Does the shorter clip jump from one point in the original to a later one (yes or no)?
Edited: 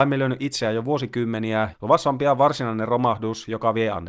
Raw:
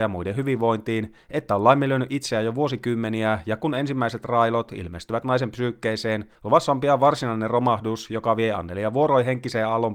yes